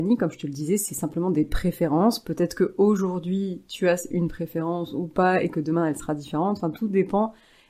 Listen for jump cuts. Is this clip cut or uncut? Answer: uncut